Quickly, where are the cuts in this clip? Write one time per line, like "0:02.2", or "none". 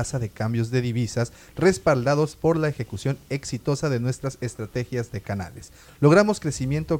none